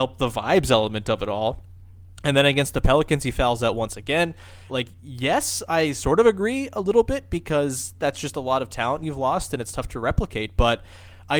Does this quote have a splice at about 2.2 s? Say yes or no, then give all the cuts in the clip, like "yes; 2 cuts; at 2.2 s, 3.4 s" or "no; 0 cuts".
no; 1 cut; at 4.7 s